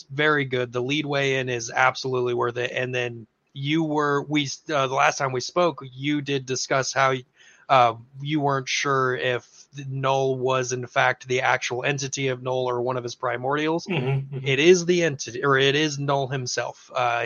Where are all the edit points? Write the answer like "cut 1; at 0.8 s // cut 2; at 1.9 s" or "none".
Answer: none